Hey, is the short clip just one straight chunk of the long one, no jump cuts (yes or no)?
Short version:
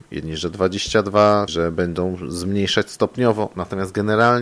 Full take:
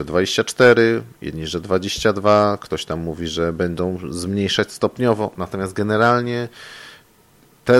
no